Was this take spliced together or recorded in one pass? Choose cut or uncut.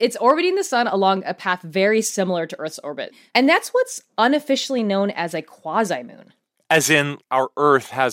cut